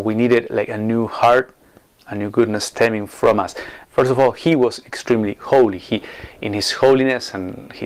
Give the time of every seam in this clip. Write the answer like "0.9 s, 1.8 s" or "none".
3.8 s